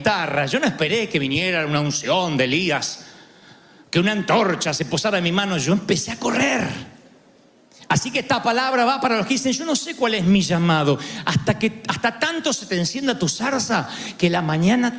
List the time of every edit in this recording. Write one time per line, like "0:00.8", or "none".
none